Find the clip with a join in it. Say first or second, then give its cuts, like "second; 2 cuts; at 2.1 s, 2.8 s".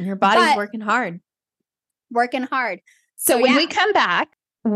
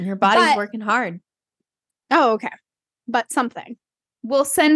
second; 1 cut; at 1.9 s